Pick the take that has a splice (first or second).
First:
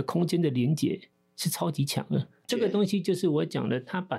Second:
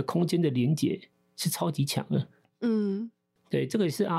first